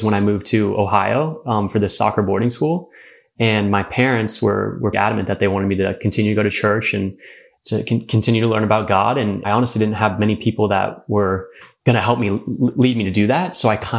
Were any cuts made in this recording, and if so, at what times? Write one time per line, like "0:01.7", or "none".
0:04.9